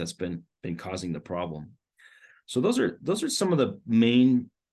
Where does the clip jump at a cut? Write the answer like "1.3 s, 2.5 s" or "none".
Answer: none